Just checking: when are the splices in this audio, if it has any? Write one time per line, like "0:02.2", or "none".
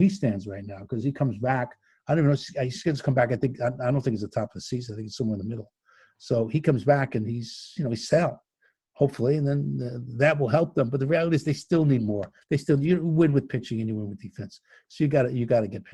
none

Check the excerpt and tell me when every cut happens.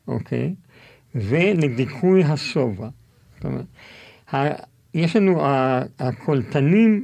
none

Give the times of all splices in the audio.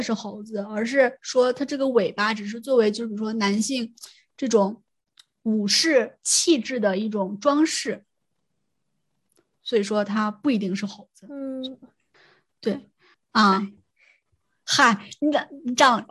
0:13.1

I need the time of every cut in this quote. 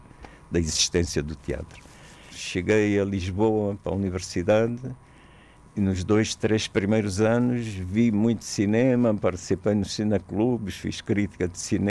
0:02.3
0:03.8

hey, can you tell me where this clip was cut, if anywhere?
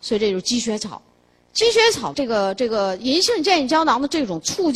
0:02.1

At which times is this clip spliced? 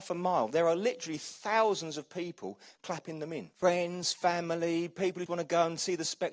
0:03.5
0:05.3

